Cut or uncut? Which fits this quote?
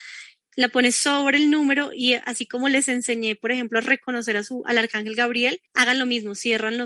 cut